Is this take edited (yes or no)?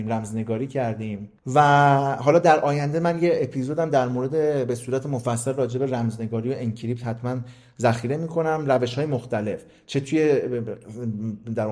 yes